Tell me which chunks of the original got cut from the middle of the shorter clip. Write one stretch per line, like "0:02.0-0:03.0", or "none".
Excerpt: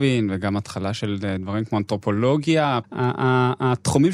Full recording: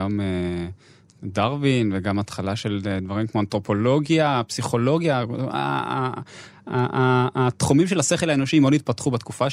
0:04.5-0:06.6

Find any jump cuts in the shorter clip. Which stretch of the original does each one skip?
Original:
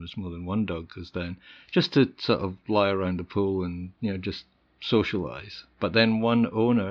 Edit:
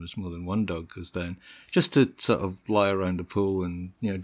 none

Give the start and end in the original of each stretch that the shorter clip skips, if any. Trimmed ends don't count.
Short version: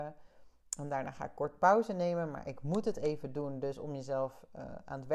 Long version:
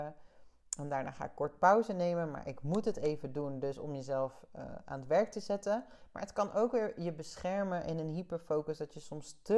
none

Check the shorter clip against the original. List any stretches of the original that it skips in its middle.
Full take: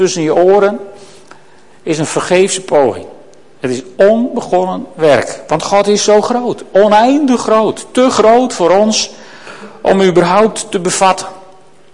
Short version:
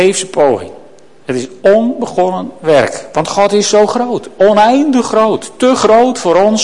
none

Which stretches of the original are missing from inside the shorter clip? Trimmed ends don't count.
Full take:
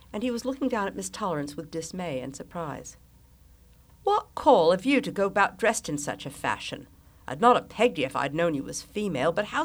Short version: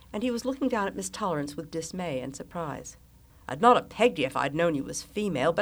0:03.3-0:07.1

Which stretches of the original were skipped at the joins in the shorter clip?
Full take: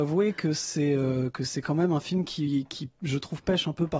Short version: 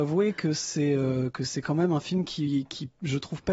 none

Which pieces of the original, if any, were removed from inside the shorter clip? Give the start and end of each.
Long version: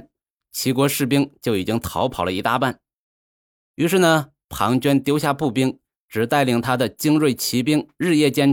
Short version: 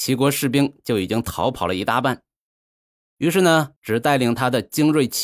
0:04.3-0:06.0

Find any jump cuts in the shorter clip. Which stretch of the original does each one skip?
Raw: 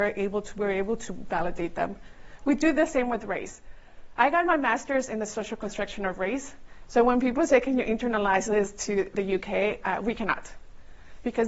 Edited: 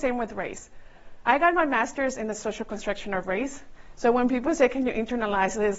none

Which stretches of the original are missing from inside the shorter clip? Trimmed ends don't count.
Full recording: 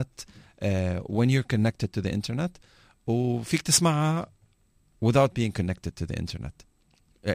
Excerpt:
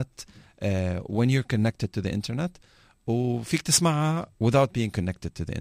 0:04.3-0:05.0

